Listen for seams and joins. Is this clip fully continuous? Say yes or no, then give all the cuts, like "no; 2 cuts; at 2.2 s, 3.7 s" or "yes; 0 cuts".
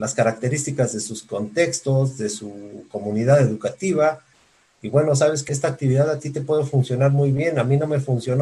no; 1 cut; at 5.5 s